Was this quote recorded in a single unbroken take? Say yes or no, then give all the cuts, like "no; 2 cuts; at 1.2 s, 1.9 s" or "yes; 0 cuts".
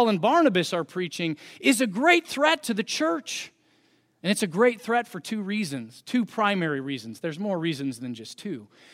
yes; 0 cuts